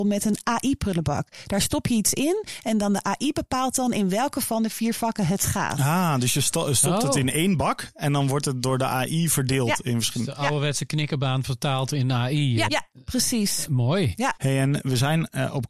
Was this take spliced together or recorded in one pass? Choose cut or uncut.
cut